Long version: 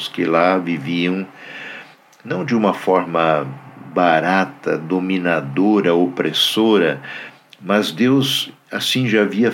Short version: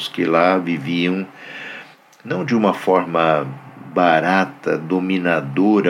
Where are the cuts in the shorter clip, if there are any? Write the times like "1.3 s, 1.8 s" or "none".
none